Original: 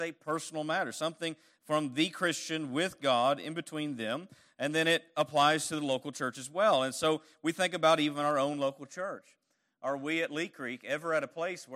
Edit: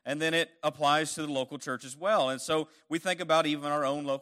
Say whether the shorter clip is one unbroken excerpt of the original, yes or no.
yes